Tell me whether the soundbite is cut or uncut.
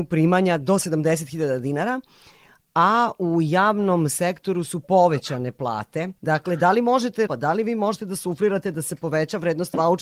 cut